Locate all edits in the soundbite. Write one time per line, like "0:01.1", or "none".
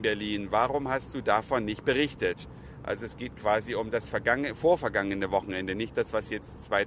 none